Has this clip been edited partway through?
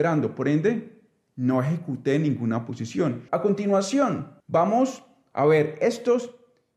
yes; 2 cuts; at 3.3 s, 4.4 s

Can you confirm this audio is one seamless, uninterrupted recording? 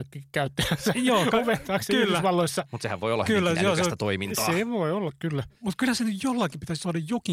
yes; 0 cuts

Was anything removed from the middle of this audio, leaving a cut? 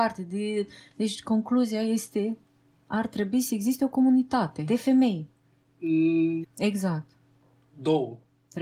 yes; 1 cut; at 6.4 s

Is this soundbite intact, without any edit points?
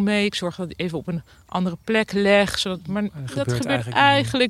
yes; 0 cuts

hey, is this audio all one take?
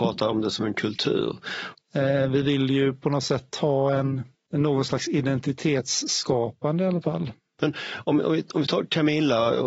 no; 2 cuts; at 1.7 s, 7.6 s

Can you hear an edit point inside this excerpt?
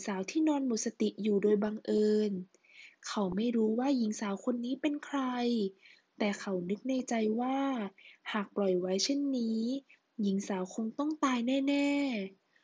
no; 0 cuts

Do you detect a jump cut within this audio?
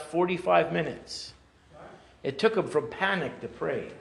no; 0 cuts

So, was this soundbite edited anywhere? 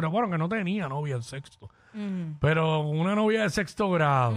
no; 0 cuts

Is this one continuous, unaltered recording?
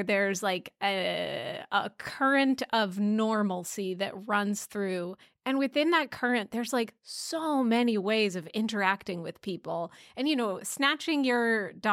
yes; 0 cuts

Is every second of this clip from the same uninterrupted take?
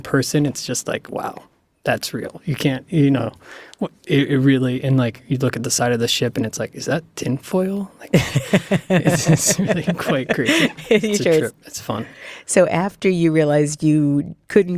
yes; 0 cuts

